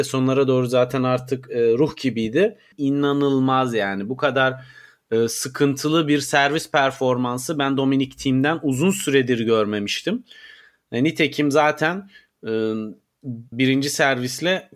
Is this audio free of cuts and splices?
no; 2 cuts; at 2.7 s, 13.5 s

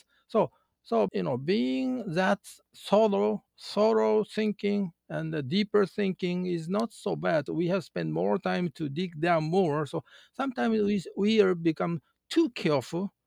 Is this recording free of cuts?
no; 2 cuts; at 1.1 s, 7.5 s

